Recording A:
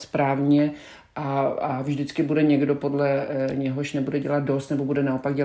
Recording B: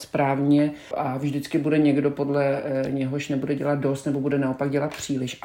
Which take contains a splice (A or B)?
B